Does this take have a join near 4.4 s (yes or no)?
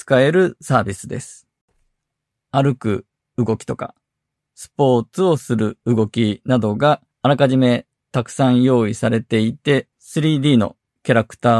yes